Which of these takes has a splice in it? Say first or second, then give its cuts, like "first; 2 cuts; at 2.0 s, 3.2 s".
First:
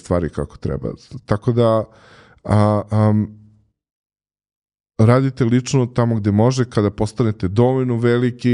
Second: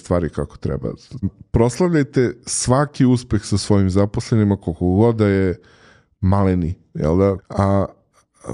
second; 2 cuts; at 1.2 s, 7.4 s